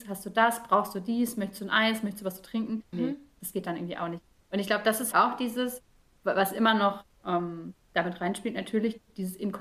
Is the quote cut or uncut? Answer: cut